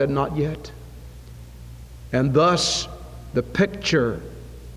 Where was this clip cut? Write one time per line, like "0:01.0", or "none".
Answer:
0:02.1